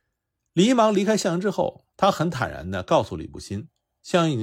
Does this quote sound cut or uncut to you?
cut